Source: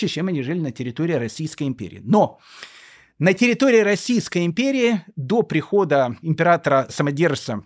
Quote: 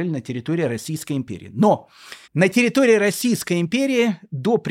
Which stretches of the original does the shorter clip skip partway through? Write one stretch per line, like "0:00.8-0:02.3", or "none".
0:02.7-0:03.1